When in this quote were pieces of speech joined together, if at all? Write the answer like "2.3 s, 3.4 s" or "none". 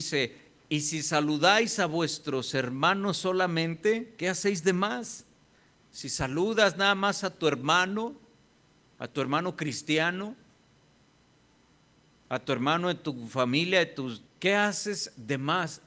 5.8 s, 14.3 s